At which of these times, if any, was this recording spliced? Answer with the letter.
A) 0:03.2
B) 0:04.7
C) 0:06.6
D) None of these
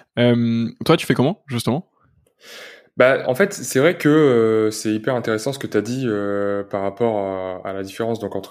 A